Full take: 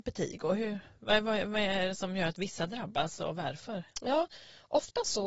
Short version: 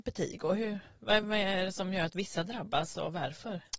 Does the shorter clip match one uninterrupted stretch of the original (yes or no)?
no